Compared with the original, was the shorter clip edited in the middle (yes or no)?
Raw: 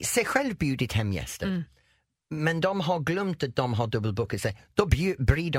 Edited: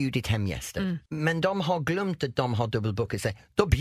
yes